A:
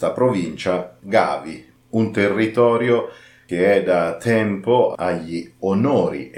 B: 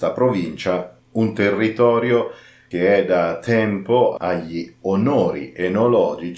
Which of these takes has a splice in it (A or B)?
B